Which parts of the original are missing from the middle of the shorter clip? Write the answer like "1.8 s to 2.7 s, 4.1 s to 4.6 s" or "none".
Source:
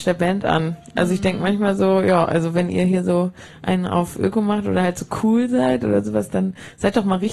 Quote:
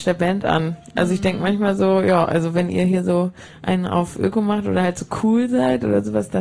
none